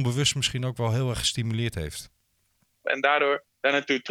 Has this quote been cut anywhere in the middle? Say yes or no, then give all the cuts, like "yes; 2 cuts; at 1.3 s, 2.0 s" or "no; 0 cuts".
yes; 1 cut; at 2.8 s